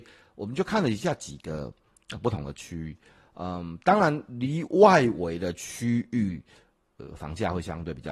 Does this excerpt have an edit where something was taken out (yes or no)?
no